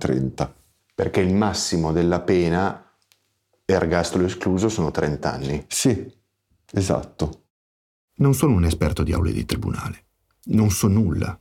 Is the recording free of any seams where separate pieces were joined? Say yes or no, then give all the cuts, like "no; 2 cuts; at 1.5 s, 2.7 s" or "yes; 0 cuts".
yes; 0 cuts